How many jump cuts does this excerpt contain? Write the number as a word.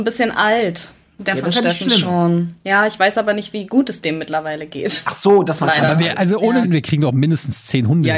one